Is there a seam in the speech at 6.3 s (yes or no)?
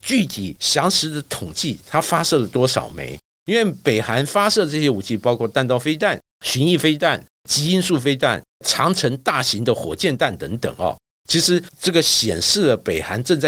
no